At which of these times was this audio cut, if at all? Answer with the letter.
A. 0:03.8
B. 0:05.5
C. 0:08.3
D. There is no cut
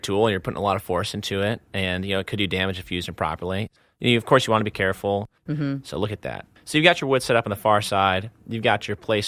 B